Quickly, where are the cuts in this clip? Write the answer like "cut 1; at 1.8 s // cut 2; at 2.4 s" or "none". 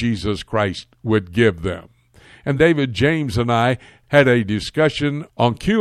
cut 1; at 2.6 s